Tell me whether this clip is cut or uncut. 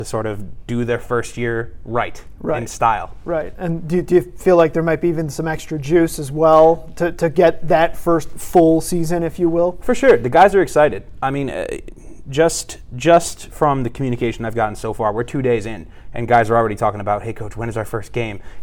uncut